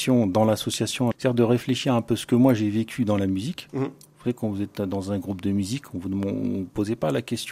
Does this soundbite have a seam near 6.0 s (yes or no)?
no